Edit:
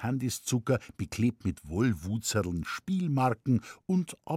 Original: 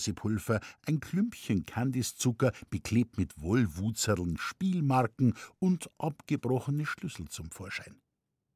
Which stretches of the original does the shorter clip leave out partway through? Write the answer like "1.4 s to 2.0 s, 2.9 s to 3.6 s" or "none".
none